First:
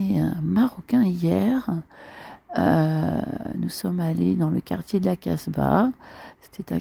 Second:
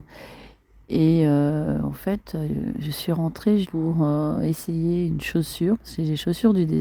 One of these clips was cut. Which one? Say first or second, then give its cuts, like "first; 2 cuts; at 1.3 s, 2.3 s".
second; 1 cut; at 3.6 s